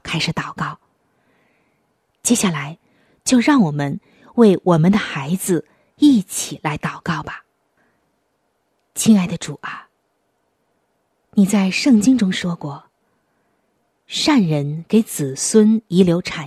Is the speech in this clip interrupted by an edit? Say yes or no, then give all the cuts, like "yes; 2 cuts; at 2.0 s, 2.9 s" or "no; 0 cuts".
no; 0 cuts